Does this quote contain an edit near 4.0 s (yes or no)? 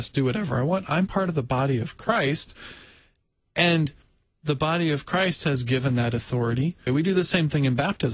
no